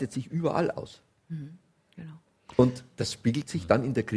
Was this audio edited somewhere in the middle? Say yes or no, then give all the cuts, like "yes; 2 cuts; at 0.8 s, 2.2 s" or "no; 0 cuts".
no; 0 cuts